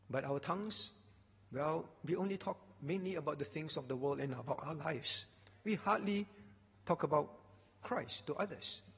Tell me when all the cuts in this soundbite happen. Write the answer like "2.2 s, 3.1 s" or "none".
none